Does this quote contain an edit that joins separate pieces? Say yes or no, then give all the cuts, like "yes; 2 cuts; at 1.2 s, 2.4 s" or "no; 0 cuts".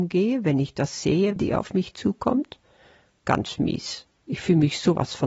yes; 1 cut; at 1.4 s